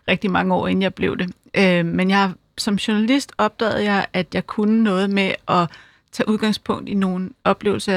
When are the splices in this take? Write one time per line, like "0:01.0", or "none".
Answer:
none